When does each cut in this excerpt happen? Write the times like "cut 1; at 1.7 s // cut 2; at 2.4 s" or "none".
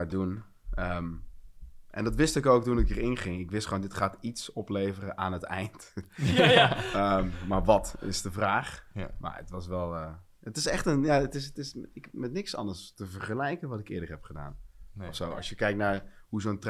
none